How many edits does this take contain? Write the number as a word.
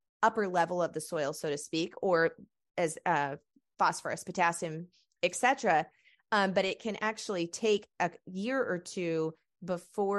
zero